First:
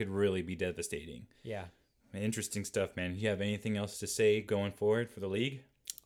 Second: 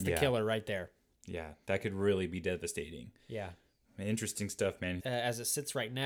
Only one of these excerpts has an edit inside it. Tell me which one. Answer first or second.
second